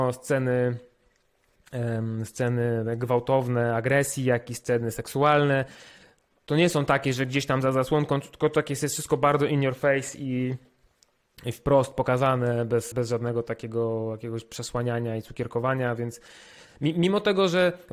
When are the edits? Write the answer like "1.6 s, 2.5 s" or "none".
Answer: 12.9 s